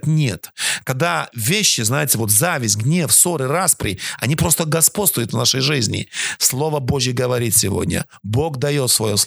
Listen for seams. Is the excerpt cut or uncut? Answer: uncut